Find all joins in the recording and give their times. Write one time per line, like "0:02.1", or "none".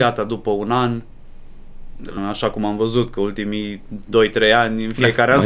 0:02.2